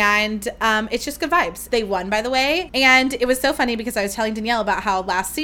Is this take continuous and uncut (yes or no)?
no